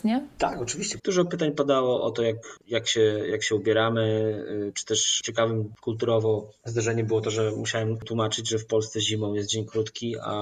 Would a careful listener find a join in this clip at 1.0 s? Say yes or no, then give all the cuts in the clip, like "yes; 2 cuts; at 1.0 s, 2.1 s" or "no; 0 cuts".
yes; 2 cuts; at 1.0 s, 2.6 s